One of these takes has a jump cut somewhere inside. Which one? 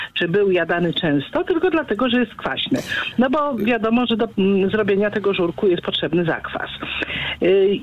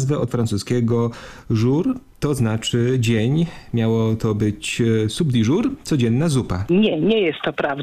second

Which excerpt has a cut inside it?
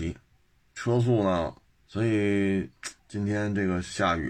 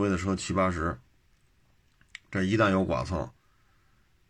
first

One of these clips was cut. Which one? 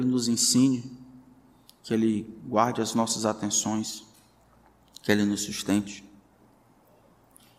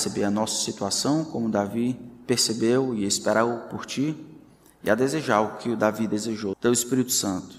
second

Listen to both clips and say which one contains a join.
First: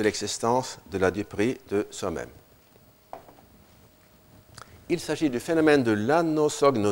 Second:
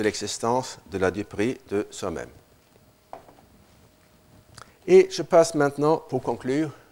second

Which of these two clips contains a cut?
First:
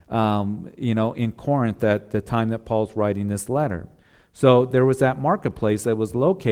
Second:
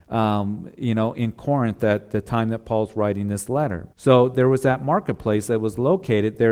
second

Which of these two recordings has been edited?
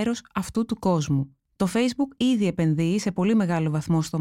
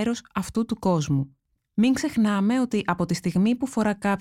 second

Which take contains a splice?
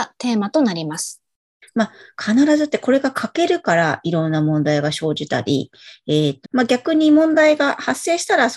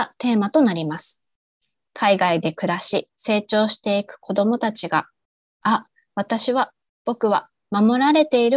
first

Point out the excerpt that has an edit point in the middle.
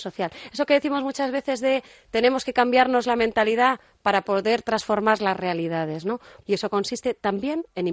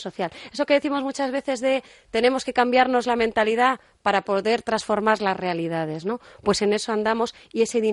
first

